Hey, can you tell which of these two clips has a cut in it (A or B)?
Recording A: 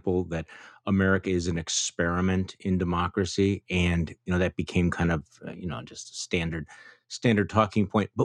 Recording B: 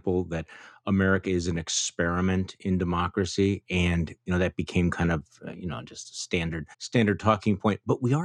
B